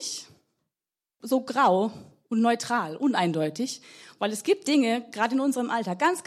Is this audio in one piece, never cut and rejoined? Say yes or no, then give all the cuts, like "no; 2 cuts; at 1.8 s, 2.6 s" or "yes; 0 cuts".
no; 1 cut; at 1.2 s